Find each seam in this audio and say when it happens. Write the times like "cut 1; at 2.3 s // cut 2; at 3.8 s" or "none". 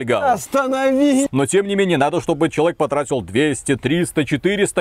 cut 1; at 1.3 s